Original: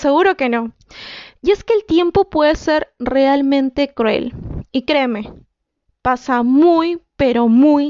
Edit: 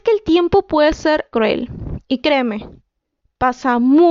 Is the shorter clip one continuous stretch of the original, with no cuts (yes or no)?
no